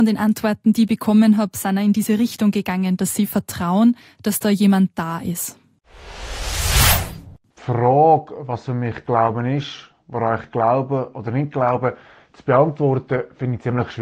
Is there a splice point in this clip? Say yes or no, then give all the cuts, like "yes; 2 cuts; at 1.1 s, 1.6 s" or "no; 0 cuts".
no; 0 cuts